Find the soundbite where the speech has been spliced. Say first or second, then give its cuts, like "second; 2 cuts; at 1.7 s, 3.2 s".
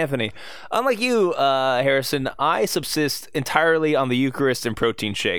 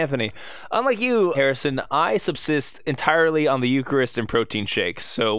second; 1 cut; at 1.3 s